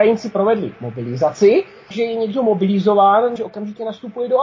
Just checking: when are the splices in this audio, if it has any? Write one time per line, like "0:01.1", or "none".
0:01.9
0:03.4